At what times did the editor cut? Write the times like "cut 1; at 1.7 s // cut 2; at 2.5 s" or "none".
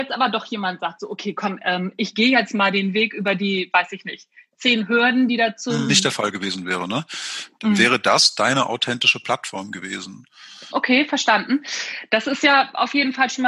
cut 1; at 5.9 s // cut 2; at 10.7 s